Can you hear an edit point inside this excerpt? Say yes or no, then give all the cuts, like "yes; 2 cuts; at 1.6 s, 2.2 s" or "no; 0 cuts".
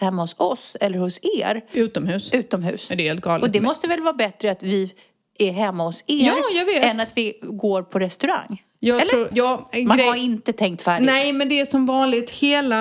yes; 1 cut; at 9.3 s